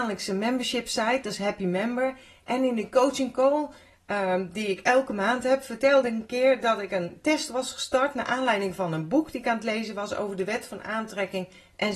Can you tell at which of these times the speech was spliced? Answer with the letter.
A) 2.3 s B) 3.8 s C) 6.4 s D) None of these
D